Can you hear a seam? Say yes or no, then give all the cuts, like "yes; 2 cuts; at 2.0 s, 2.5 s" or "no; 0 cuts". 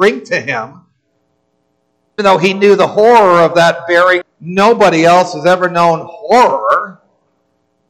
yes; 2 cuts; at 2.2 s, 4.2 s